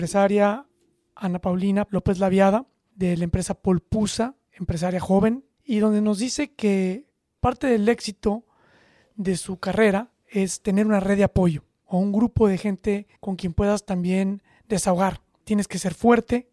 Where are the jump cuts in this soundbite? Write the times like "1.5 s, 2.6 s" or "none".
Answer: 5.5 s, 13.2 s